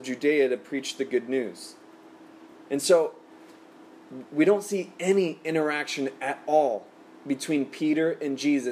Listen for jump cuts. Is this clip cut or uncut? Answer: uncut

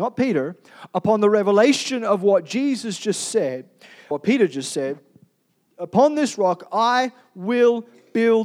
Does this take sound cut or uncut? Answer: cut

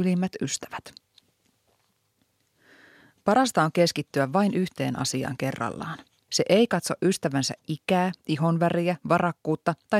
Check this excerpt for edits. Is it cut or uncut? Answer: cut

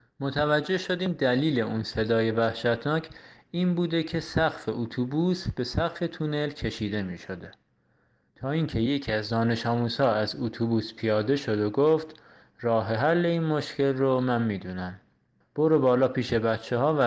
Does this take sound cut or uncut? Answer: cut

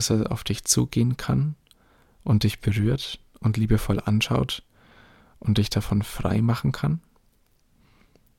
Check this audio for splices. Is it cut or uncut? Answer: uncut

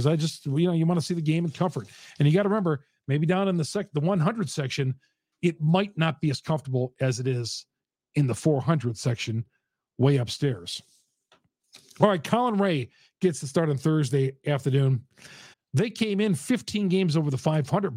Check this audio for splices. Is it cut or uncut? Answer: cut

